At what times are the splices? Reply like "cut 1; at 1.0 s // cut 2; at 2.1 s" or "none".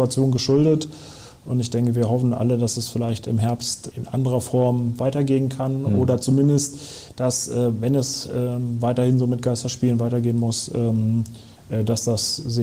cut 1; at 3.9 s